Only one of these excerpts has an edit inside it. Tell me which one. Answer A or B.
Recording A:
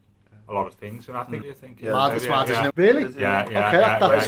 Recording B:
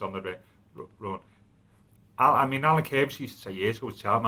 A